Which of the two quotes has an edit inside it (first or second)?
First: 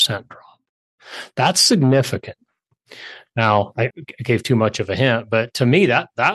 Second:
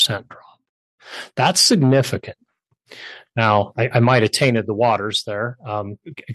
first